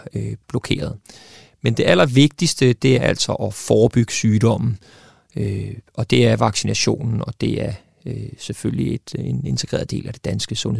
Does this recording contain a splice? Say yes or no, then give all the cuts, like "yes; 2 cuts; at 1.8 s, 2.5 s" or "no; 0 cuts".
yes; 1 cut; at 2.9 s